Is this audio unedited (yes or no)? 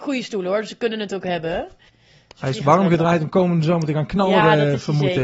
no